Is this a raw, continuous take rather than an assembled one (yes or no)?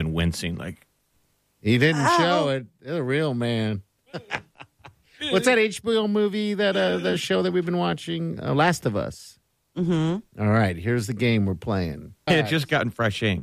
no